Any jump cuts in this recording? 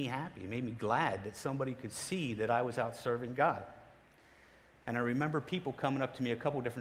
yes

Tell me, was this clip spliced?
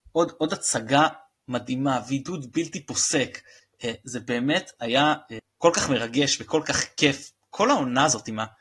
no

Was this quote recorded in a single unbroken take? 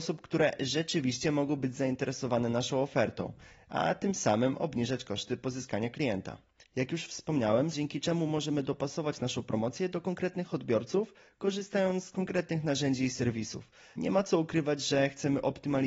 no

